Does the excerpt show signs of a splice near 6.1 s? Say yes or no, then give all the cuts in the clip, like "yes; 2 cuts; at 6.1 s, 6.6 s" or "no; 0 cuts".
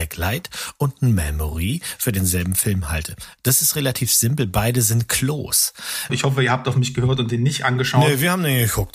yes; 1 cut; at 6.1 s